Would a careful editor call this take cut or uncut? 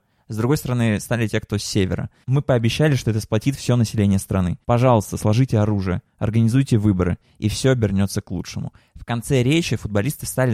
cut